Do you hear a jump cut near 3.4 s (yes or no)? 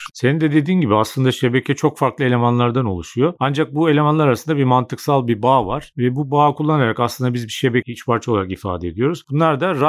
no